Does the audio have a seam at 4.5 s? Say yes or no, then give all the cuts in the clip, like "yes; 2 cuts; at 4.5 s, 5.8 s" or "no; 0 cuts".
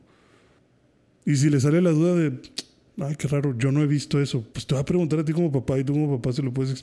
yes; 1 cut; at 4.5 s